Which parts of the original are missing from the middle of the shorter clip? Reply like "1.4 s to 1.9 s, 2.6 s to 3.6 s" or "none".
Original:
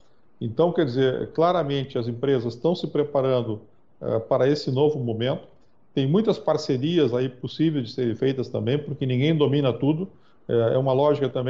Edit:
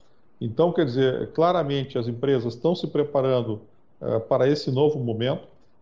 none